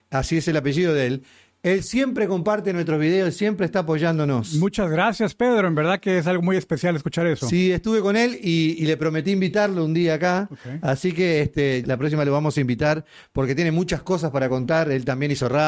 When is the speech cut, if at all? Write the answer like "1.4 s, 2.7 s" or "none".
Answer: 11.8 s